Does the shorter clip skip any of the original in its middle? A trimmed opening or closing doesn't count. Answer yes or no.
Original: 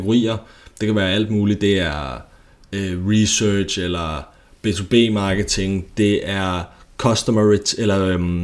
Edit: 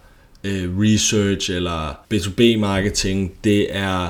yes